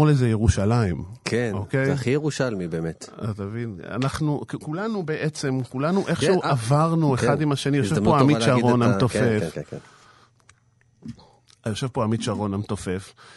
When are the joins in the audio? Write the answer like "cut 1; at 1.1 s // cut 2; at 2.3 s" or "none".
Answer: cut 1; at 4.6 s

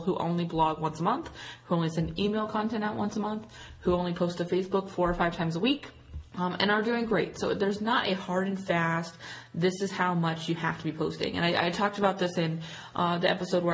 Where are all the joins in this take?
cut 1; at 6.3 s

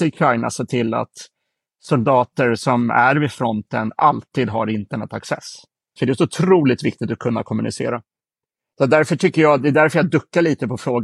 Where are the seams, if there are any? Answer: cut 1; at 6.0 s

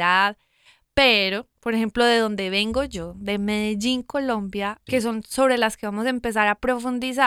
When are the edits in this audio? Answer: cut 1; at 4.9 s

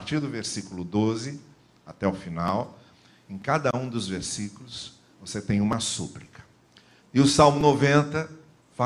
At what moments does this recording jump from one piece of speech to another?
cut 1; at 5.1 s // cut 2; at 7.0 s

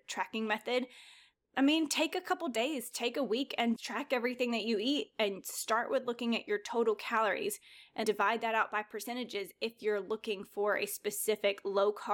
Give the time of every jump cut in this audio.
cut 1; at 3.8 s // cut 2; at 8.0 s

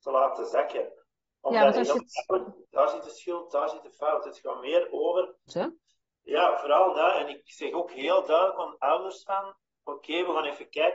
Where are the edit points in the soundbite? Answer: cut 1; at 2.7 s // cut 2; at 5.5 s

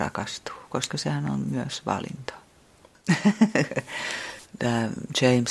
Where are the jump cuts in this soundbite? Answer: cut 1; at 4.4 s

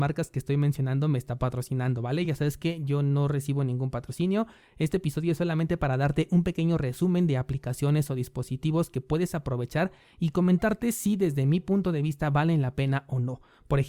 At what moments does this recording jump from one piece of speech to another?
none

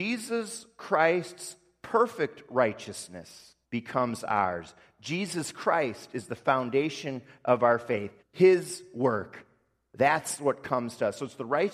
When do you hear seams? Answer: cut 1; at 3.6 s // cut 2; at 8.2 s

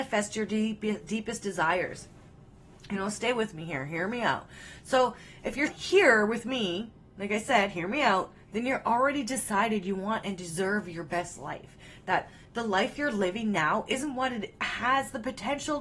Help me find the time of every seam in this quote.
cut 1; at 5.7 s

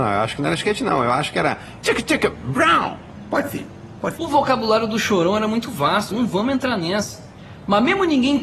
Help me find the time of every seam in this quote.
cut 1; at 4.2 s // cut 2; at 6.1 s

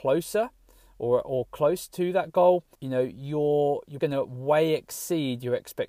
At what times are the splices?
cut 1; at 2.7 s // cut 2; at 4.0 s

